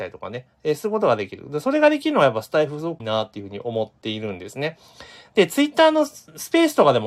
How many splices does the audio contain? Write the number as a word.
one